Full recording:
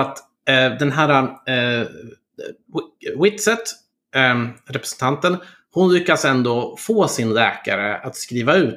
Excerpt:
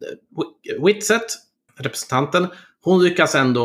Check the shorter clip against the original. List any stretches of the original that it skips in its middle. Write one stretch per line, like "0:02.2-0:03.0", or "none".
0:04.1-0:04.6

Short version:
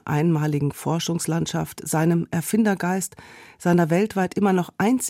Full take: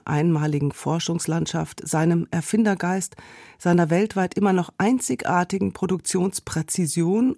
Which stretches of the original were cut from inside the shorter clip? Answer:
none

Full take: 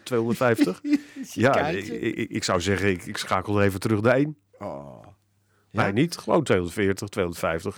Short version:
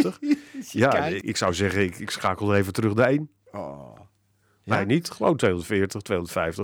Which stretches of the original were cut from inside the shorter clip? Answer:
0:01.8-0:02.3

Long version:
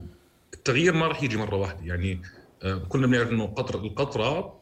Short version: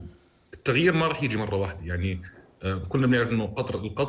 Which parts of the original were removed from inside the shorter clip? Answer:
none

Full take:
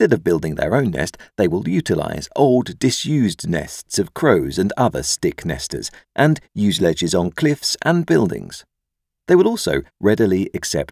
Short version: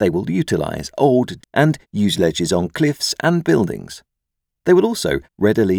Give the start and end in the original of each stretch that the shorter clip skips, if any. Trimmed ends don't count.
0:02.8-0:06.0

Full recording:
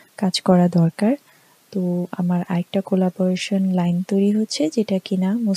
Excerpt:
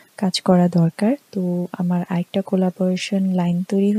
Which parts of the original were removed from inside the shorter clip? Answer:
0:01.2-0:01.6

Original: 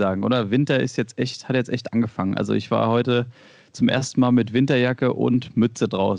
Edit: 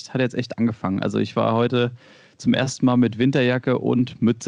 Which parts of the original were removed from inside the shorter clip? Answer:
none

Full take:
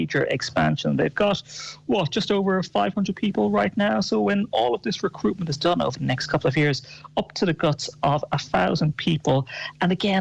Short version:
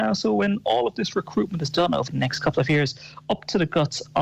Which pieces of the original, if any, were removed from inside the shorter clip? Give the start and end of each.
none

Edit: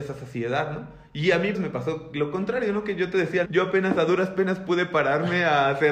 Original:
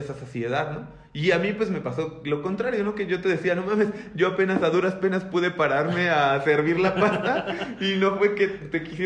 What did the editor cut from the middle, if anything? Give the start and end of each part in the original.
0:01.5-0:01.7
0:03.6-0:04.1

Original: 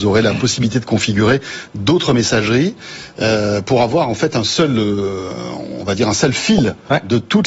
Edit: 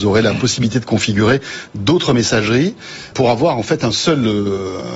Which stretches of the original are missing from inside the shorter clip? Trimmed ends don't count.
0:03.1-0:03.6

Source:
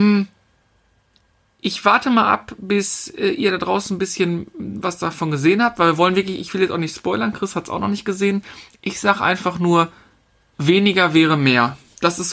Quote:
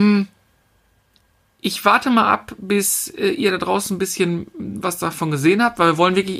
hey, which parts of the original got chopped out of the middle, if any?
none

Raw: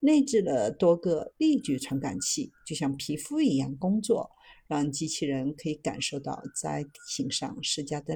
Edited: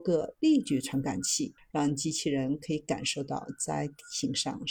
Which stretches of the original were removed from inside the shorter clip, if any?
0:02.6-0:04.5

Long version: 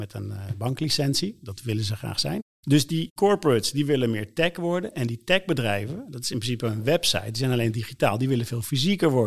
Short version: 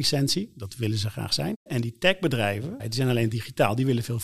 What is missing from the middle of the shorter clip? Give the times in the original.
0:02.5-0:04.9
0:06.1-0:07.2

